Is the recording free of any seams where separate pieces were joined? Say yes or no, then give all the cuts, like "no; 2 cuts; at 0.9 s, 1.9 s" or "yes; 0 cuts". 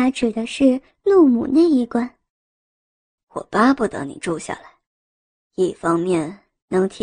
no; 1 cut; at 3.2 s